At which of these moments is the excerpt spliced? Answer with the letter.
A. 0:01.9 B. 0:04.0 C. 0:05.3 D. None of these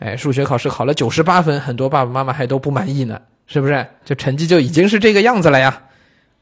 B